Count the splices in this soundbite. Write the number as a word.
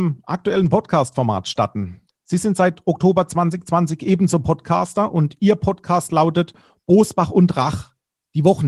one